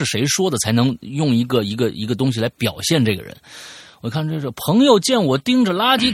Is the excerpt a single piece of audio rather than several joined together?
yes; 0 cuts

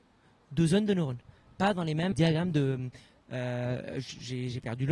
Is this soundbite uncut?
no; 1 cut; at 2.1 s

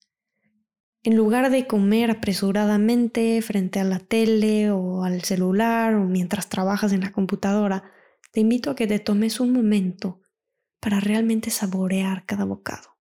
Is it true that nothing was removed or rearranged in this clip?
yes; 0 cuts

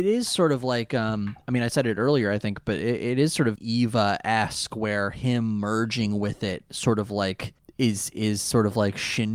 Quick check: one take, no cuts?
no; 1 cut; at 3.6 s

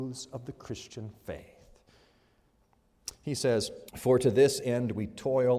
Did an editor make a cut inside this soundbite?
yes; 1 cut; at 3.9 s

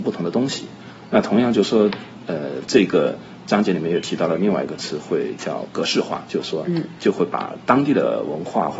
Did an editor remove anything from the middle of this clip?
no; 0 cuts

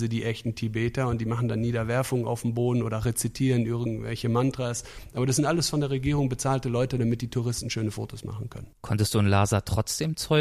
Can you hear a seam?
yes; 1 cut; at 8.7 s

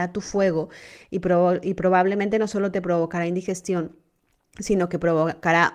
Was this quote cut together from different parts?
no; 0 cuts

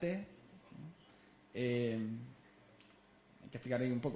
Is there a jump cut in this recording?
no; 0 cuts

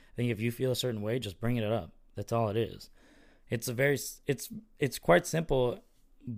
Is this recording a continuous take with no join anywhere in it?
yes; 0 cuts

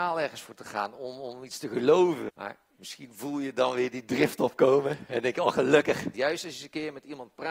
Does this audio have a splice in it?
yes; 2 cuts; at 2.3 s, 6.1 s

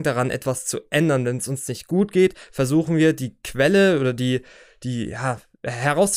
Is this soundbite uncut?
yes; 0 cuts

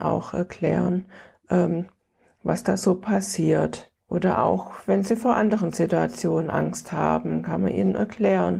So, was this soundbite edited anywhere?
no; 0 cuts

